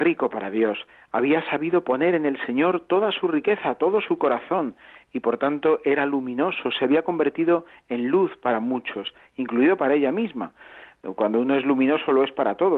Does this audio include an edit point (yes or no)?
no